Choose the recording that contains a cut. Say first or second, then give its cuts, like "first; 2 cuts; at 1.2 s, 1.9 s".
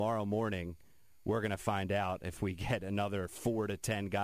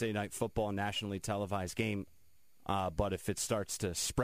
second; 1 cut; at 2.6 s